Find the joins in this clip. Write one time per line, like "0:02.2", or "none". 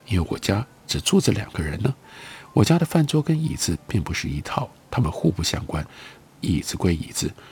0:06.2

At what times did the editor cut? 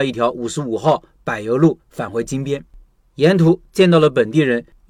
none

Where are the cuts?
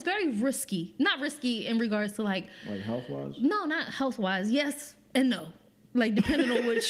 none

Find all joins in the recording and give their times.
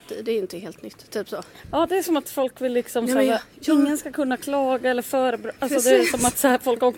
none

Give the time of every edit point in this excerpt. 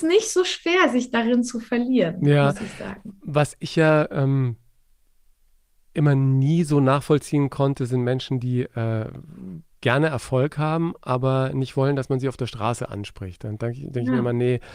none

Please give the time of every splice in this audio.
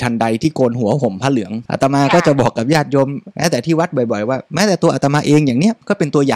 0:01.7

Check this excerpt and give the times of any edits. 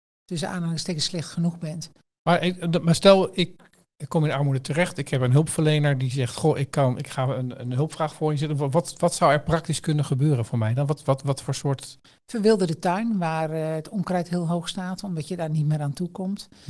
none

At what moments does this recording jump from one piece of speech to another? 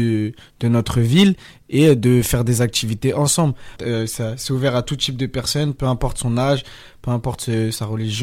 0:03.8

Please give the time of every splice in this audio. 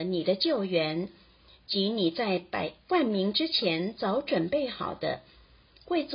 none

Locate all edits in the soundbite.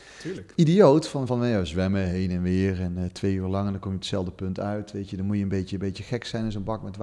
none

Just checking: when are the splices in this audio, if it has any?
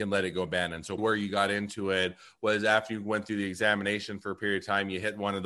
0:01.0

